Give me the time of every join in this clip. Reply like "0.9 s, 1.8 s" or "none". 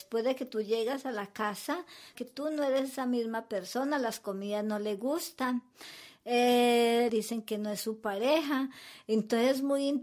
2.2 s, 7.1 s